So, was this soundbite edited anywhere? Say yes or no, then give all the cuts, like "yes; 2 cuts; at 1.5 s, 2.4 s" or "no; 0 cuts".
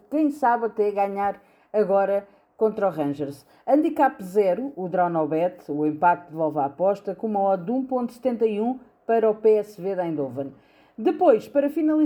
no; 0 cuts